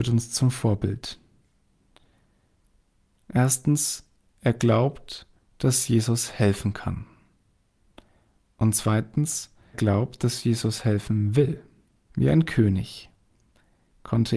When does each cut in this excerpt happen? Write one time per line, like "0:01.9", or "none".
0:09.7
0:12.1